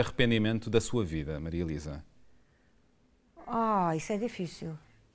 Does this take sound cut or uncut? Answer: uncut